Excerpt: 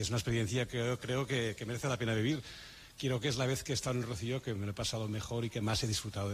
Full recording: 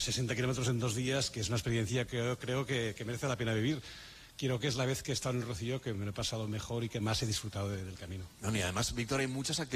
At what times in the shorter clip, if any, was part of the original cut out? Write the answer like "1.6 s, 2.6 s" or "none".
none

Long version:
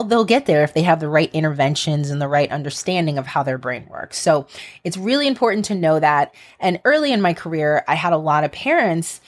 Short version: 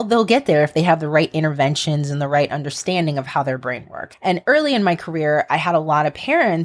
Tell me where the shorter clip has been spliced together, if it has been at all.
4.1 s

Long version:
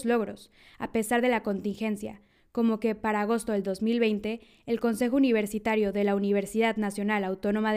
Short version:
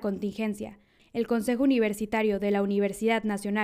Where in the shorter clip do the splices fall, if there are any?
1.0 s

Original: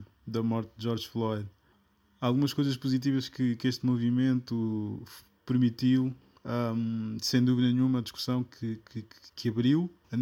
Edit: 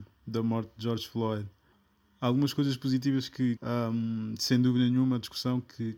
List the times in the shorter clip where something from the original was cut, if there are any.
3.6 s

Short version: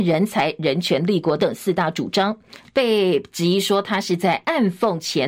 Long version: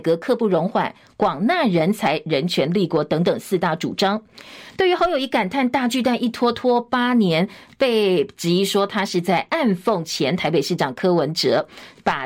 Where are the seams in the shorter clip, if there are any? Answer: 1.4 s, 2.6 s

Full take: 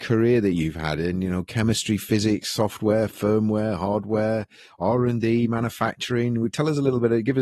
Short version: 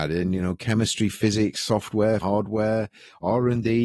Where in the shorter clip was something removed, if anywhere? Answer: 2.2 s

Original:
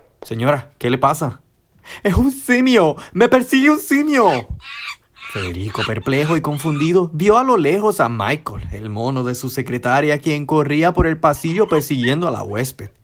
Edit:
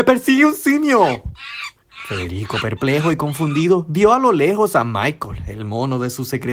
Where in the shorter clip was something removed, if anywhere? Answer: none

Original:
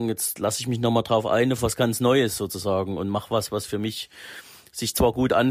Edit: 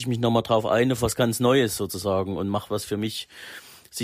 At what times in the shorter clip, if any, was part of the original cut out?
2.7 s

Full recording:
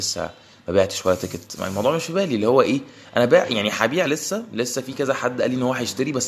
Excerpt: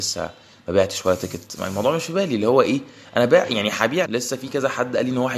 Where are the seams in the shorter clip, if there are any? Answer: 4.0 s

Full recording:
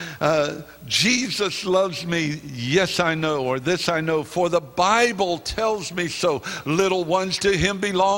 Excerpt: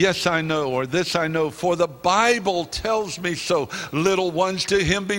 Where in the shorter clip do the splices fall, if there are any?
none

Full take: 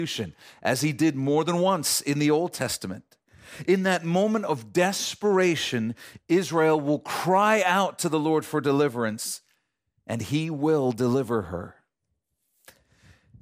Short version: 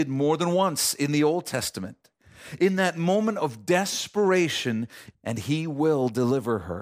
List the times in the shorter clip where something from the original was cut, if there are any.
5.1 s

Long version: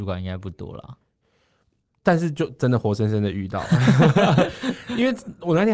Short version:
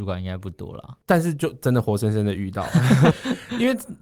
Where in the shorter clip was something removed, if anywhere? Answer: 1.0 s, 3.1 s

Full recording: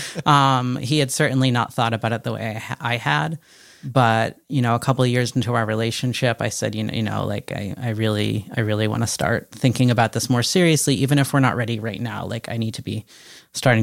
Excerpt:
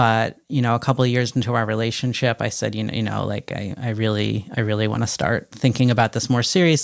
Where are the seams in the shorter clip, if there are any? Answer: none

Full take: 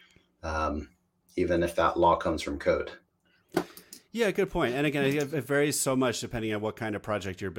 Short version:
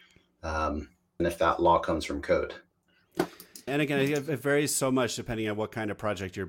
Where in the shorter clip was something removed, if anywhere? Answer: 1.2 s, 3.7 s

